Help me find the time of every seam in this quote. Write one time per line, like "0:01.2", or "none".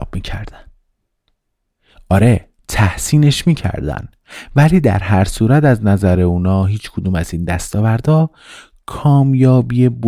0:02.6